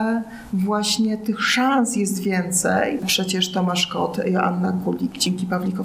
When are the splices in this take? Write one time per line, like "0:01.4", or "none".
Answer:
0:03.0